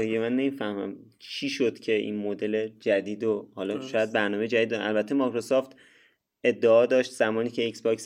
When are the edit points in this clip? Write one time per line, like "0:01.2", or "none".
none